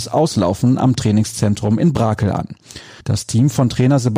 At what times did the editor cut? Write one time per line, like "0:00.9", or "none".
0:03.0